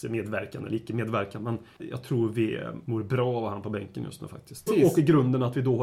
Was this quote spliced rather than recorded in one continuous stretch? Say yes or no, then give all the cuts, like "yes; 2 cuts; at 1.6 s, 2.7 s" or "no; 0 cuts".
yes; 1 cut; at 4.7 s